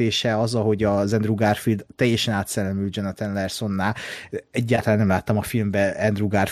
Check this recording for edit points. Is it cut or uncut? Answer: uncut